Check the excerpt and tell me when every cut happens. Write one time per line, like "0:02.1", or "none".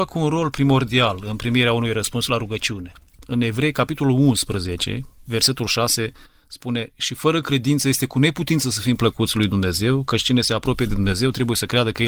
0:05.3